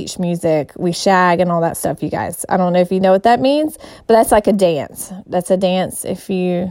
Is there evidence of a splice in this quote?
no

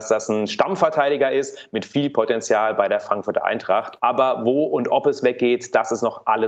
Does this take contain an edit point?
yes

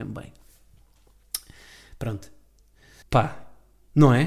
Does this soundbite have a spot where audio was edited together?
yes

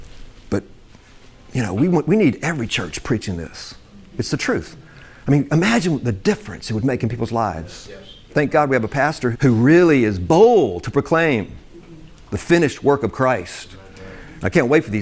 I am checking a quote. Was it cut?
yes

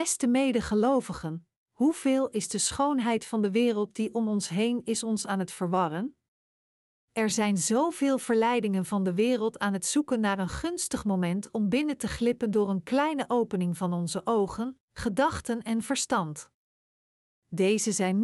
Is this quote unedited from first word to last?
no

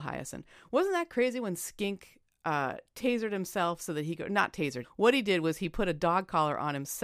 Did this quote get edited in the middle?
yes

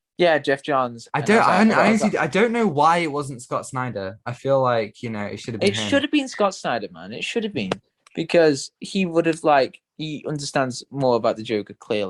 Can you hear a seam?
no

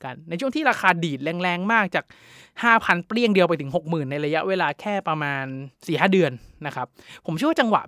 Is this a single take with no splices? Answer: no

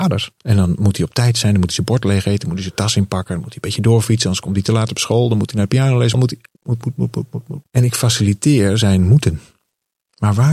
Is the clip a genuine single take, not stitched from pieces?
no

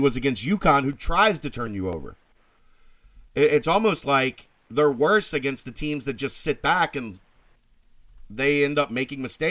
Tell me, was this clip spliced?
no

